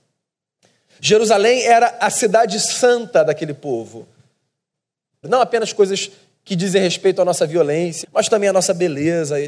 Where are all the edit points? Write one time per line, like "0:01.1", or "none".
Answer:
0:05.2
0:08.0